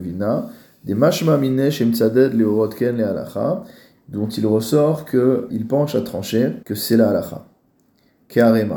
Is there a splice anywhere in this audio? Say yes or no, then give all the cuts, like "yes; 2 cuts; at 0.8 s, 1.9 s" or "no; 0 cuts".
yes; 2 cuts; at 5.5 s, 6.6 s